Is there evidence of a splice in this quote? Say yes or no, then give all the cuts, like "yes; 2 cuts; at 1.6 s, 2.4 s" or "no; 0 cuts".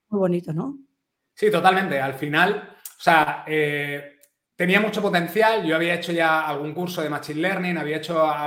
no; 0 cuts